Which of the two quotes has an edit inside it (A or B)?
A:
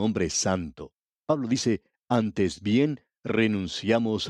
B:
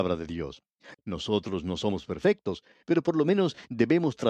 B